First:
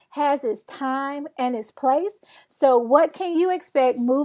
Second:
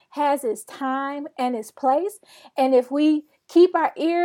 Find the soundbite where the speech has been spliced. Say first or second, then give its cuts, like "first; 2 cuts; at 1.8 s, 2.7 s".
first; 1 cut; at 2.4 s